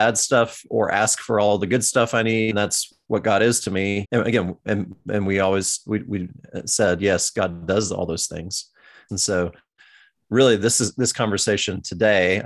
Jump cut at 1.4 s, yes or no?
no